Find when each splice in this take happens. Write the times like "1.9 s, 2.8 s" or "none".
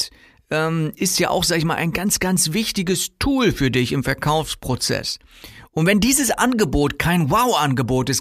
none